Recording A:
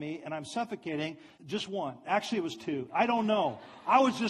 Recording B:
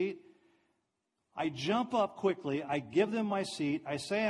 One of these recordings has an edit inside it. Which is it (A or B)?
A